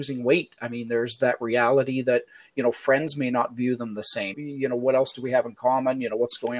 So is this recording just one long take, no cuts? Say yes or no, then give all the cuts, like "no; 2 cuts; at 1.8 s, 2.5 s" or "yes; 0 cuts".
no; 1 cut; at 4.3 s